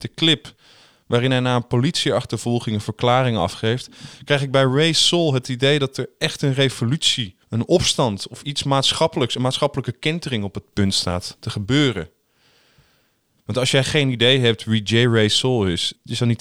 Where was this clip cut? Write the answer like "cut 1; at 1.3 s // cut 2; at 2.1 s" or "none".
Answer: cut 1; at 7.4 s // cut 2; at 8.4 s // cut 3; at 13.4 s